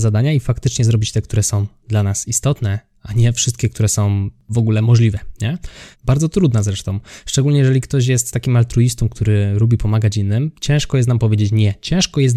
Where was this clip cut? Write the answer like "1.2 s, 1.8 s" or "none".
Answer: 5.9 s